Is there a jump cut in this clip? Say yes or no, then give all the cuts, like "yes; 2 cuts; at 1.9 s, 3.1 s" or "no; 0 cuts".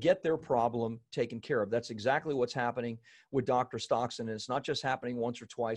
no; 0 cuts